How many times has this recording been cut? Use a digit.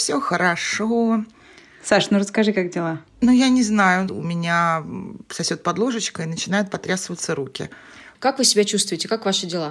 2